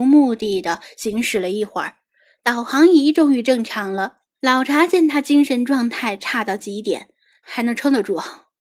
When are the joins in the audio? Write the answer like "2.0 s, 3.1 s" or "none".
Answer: 4.4 s, 7.4 s